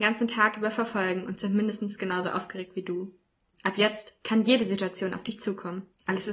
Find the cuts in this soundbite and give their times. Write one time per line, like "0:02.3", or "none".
0:03.5